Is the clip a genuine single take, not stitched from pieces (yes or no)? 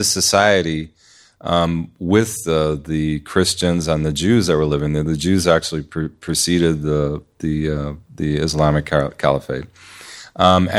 yes